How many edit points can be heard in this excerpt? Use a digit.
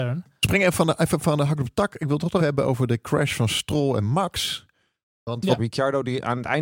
2